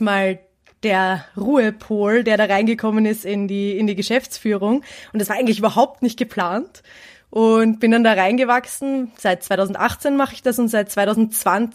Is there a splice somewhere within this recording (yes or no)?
no